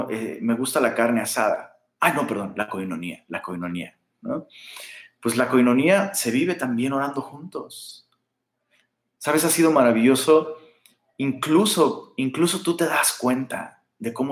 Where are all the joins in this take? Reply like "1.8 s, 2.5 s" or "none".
none